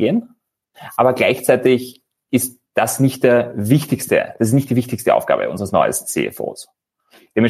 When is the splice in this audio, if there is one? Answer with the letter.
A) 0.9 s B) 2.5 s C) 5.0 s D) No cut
D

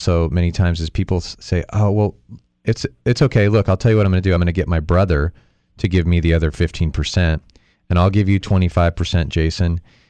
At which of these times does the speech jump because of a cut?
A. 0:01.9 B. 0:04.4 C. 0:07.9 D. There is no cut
D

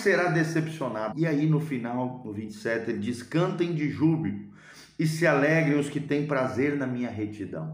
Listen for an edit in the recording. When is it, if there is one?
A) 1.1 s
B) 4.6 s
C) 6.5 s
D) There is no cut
A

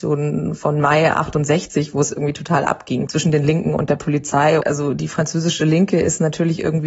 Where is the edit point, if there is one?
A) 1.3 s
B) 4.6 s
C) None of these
B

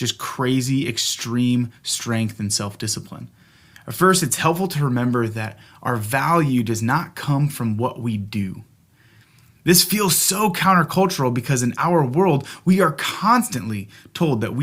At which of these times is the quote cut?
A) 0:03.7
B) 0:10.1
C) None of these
A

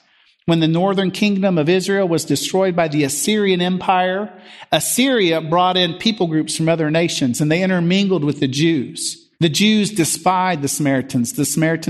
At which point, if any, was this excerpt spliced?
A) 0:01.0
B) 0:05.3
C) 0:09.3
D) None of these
C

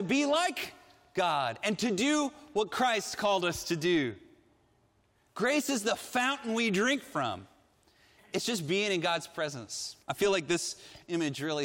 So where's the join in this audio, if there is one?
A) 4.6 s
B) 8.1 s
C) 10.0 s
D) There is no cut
C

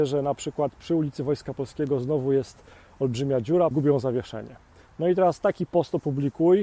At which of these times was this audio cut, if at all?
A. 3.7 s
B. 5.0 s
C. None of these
A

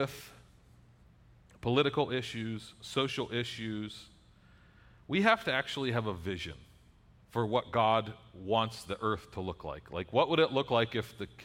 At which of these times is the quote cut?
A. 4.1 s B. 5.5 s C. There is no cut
C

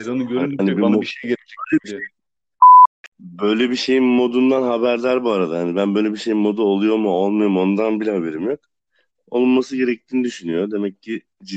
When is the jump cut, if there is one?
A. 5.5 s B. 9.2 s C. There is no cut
C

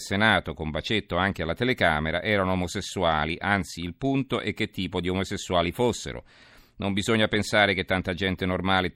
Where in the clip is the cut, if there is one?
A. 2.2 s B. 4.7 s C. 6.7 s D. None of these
D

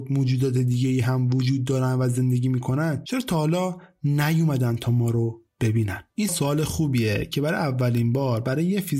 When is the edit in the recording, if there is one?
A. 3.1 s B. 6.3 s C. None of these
B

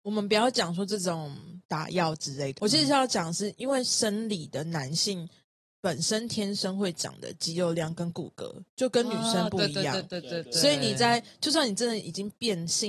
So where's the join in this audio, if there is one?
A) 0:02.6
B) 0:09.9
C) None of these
A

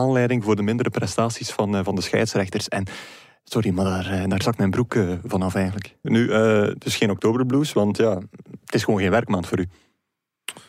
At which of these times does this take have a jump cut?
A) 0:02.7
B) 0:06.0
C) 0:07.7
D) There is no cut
B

